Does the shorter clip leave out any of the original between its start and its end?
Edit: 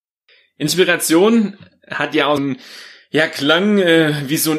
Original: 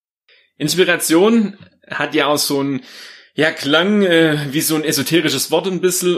yes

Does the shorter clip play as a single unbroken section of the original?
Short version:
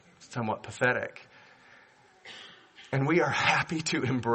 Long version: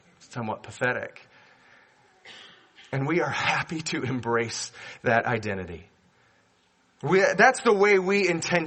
yes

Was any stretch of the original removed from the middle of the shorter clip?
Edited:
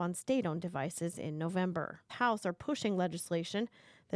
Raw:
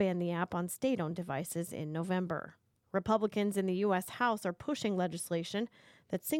yes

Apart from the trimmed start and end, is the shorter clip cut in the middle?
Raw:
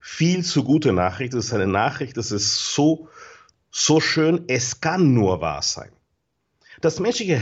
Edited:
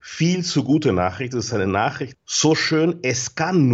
yes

